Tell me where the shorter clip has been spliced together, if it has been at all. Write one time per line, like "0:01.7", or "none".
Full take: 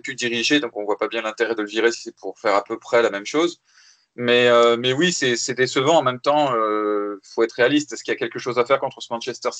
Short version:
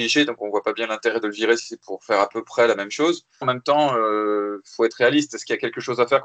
0:03.4

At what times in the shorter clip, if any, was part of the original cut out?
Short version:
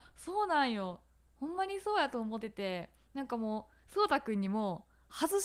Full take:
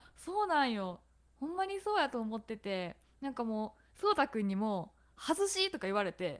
0:02.4

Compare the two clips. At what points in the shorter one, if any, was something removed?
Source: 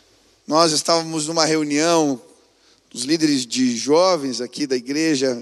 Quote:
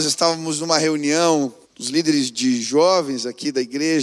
0:01.6

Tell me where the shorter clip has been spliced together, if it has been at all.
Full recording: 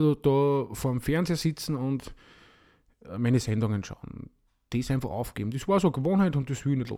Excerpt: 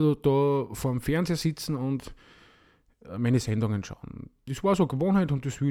0:04.5

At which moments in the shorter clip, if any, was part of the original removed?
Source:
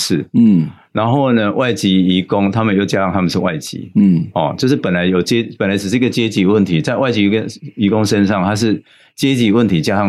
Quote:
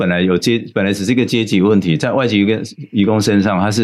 none

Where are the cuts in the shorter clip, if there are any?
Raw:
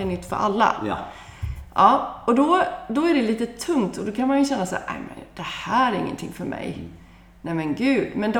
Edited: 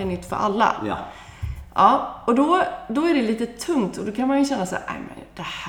none

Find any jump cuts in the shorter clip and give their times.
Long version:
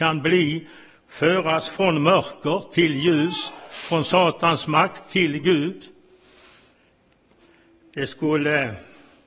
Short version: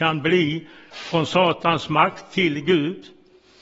0:00.9

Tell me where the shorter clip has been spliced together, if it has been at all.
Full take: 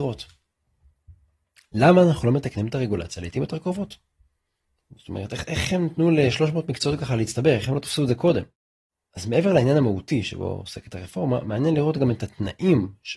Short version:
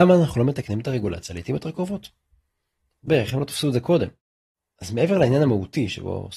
0:03.1

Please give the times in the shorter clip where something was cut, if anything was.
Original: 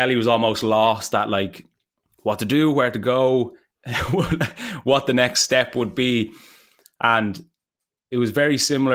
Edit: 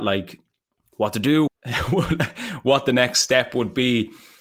0:01.5

